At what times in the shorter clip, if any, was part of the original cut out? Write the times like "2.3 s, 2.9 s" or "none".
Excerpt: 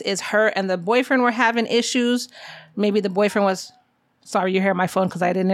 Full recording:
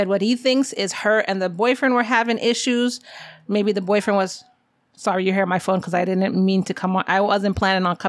none